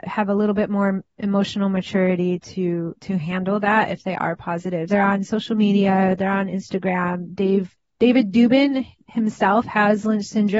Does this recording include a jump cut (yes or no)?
yes